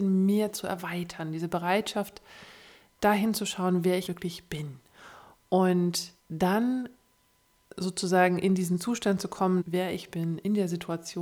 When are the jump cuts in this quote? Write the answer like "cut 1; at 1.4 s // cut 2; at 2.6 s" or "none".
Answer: cut 1; at 4.1 s // cut 2; at 6.2 s // cut 3; at 9.6 s